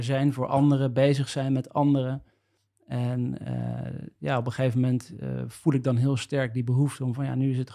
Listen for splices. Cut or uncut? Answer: uncut